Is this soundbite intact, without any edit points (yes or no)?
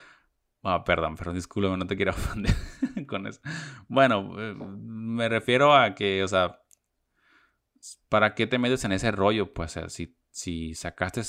yes